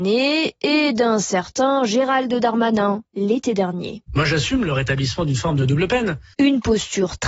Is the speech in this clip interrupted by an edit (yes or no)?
yes